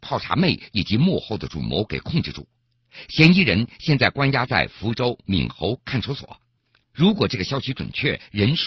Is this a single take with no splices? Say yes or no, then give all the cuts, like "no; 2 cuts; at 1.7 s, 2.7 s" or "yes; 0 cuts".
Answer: no; 1 cut; at 6.9 s